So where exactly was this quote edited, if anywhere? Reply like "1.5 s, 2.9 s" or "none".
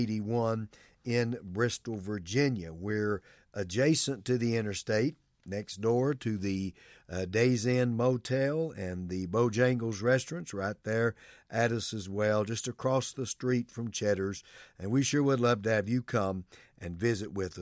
none